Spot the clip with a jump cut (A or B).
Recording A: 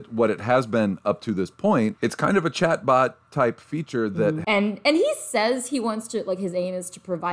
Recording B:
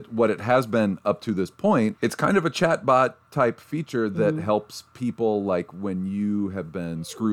A